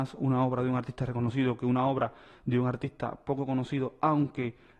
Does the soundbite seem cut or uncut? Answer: uncut